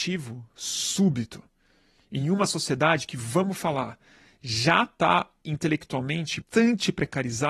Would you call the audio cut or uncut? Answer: cut